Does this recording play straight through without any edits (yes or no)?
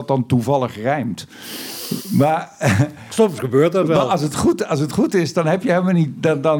yes